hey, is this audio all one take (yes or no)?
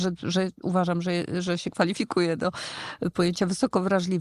yes